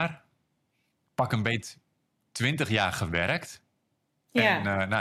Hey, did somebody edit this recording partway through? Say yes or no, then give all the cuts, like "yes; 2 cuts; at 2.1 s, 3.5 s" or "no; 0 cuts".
no; 0 cuts